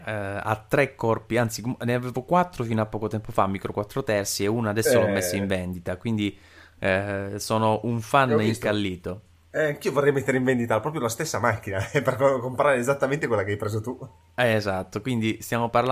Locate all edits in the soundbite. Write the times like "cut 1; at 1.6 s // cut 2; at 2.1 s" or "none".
none